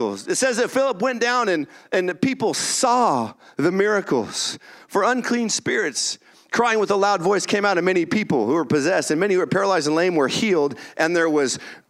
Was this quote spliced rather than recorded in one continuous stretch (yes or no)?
no